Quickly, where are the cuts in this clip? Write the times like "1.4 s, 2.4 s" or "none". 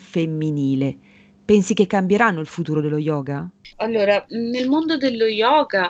3.7 s

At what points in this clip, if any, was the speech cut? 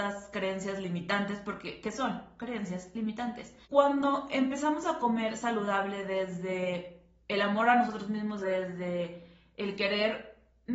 3.6 s, 8.4 s

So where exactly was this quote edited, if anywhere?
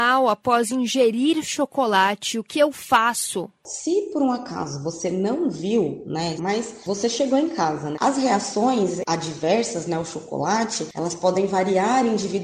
6.4 s, 7.9 s

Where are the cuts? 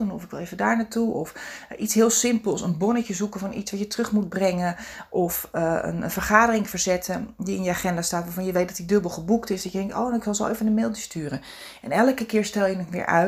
none

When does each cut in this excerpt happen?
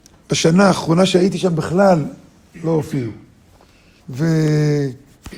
4.0 s

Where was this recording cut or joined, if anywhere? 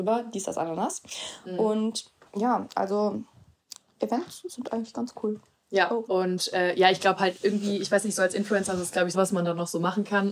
6.1 s, 9.1 s

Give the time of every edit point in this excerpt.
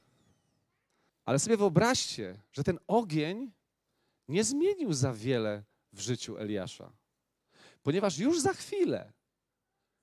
1.1 s

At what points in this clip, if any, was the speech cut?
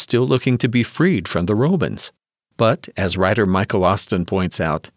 2.4 s

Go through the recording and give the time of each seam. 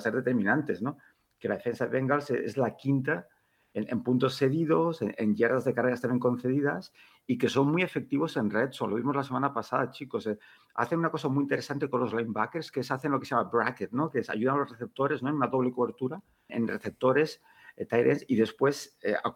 16.5 s

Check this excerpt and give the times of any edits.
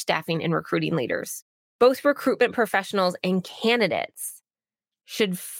1.6 s

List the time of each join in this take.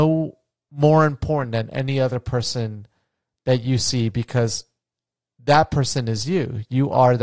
none

